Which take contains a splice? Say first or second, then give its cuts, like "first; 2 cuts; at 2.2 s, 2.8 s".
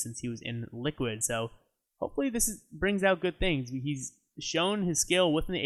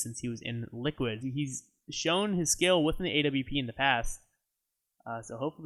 second; 1 cut; at 1.2 s